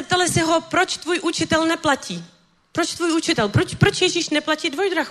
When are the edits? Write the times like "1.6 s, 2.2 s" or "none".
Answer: none